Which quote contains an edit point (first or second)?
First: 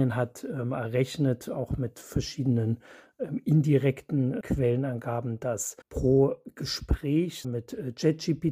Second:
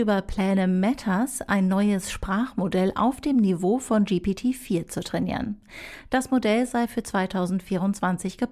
first